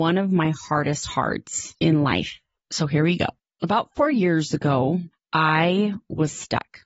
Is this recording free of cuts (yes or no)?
yes